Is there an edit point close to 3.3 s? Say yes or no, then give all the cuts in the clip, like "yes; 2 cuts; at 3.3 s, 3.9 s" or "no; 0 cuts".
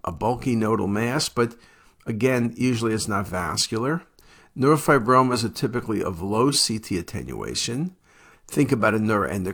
yes; 2 cuts; at 3.3 s, 8.3 s